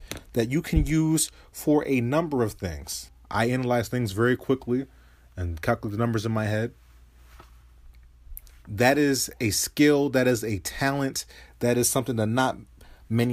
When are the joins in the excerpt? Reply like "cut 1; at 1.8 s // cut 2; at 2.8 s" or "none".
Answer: cut 1; at 3.2 s